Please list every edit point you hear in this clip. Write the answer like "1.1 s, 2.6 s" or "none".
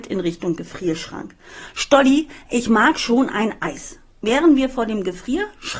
none